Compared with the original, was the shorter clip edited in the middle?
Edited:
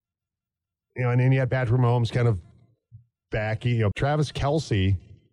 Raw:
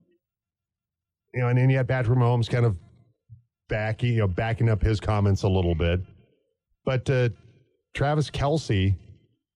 yes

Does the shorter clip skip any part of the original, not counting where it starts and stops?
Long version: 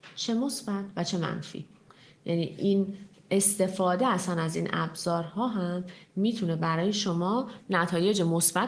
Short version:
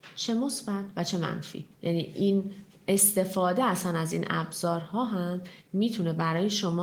yes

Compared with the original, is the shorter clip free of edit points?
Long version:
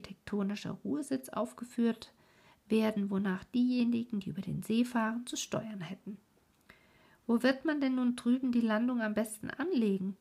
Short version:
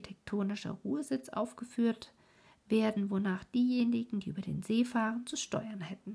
yes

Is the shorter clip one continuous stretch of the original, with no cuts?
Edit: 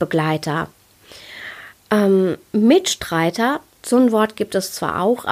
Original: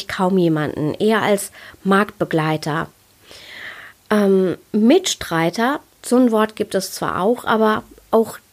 yes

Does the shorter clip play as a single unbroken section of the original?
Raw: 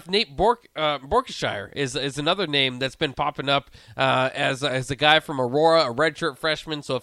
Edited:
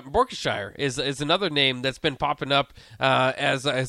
yes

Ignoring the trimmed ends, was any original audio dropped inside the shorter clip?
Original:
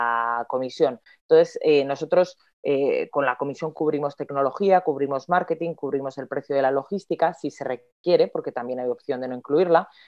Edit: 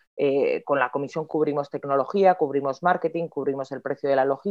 no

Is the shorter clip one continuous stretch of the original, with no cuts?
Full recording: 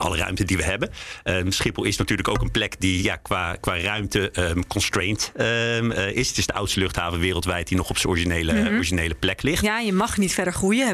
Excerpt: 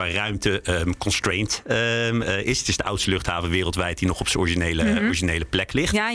yes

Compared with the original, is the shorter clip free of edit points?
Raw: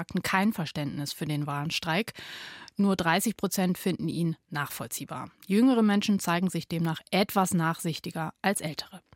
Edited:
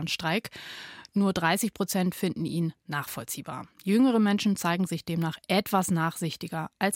yes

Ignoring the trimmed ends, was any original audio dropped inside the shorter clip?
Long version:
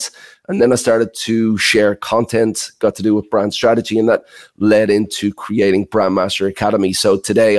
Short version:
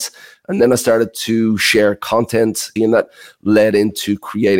yes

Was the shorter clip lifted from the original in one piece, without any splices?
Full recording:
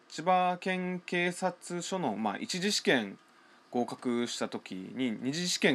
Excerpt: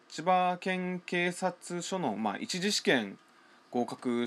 yes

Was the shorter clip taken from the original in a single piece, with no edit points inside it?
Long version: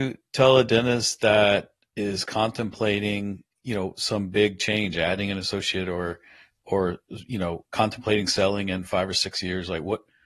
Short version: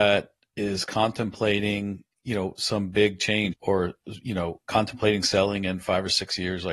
no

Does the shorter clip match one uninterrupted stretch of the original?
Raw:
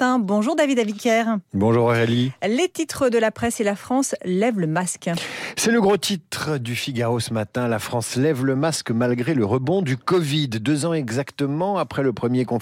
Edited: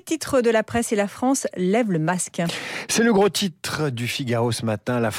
yes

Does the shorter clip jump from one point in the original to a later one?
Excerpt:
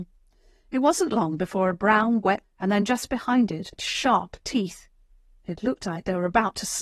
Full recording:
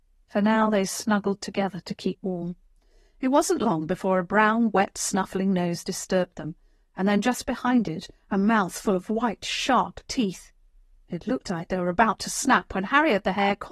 yes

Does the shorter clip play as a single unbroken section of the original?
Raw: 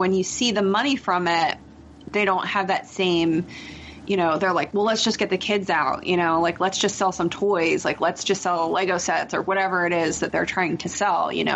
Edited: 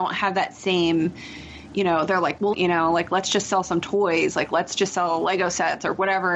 no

